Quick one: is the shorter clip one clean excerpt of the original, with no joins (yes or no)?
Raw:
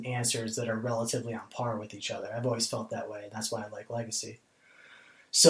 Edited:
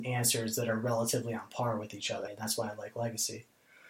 no